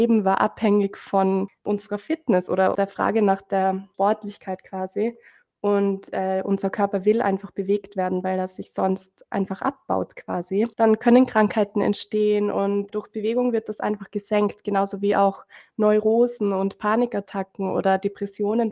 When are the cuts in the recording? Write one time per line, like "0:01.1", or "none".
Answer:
0:10.7